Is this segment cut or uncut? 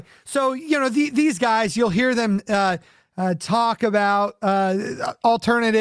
uncut